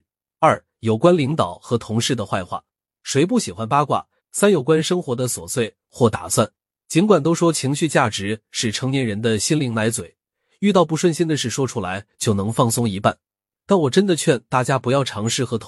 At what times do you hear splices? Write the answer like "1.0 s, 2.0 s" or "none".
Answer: 4.2 s